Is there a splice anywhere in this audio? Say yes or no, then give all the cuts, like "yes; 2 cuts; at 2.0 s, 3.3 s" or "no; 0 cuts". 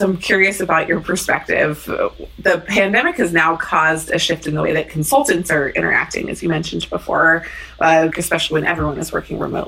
yes; 1 cut; at 8.1 s